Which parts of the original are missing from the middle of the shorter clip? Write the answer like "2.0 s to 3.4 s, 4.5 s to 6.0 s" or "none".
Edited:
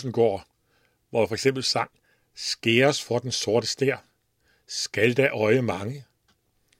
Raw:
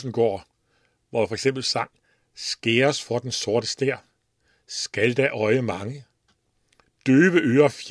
none